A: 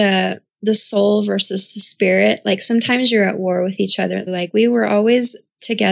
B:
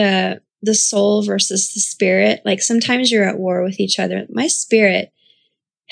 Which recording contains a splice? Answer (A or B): A